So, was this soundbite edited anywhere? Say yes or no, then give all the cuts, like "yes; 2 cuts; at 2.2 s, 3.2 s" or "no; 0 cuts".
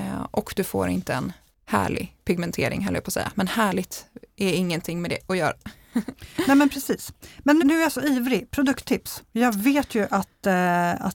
yes; 1 cut; at 7.6 s